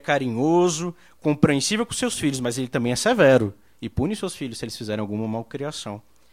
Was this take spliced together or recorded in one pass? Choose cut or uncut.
uncut